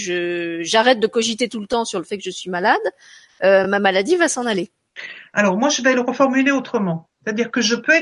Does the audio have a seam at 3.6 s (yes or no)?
no